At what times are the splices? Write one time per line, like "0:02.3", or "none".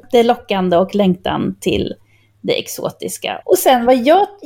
0:03.4